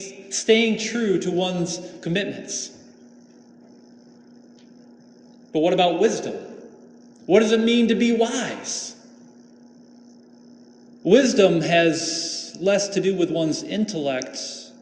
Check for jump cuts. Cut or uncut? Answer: uncut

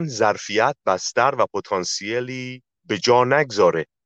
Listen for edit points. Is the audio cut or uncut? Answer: uncut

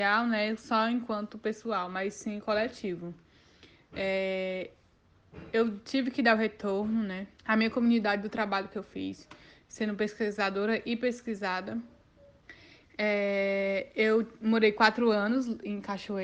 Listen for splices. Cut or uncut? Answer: cut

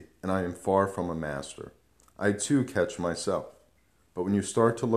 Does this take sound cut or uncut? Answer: uncut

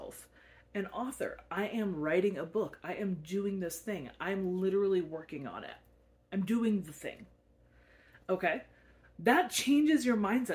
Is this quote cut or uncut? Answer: uncut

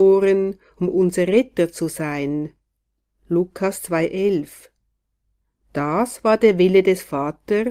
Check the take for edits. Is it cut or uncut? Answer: uncut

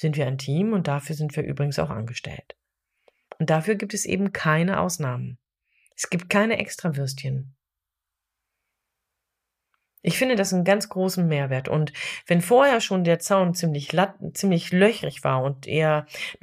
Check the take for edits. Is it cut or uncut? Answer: uncut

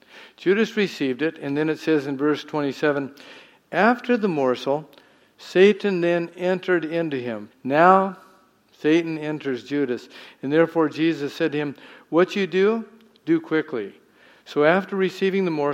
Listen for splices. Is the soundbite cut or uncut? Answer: cut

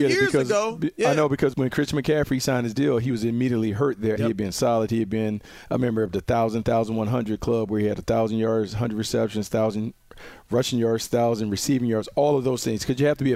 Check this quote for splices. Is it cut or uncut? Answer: cut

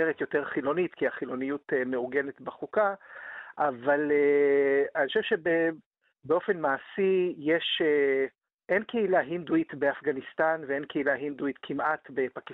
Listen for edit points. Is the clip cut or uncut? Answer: uncut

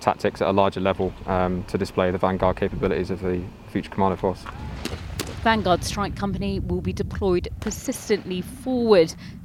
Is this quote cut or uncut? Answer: uncut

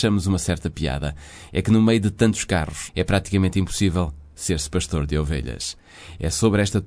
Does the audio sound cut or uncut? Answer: cut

